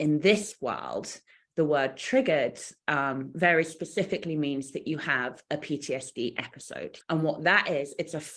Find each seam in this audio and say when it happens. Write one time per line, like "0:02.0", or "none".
0:07.0